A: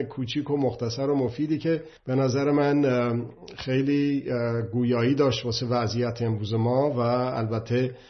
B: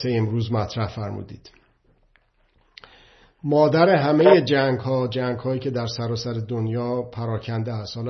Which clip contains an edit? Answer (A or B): A